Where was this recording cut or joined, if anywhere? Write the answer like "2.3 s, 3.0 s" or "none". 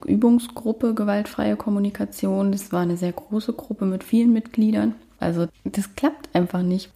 5.2 s